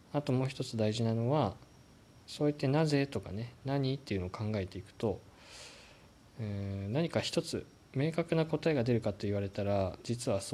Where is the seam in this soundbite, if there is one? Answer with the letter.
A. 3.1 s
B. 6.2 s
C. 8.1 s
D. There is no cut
D